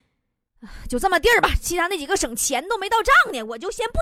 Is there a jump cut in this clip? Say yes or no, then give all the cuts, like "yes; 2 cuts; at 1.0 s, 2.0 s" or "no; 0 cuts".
no; 0 cuts